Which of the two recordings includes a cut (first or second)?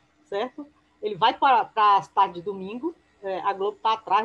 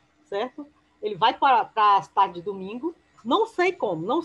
second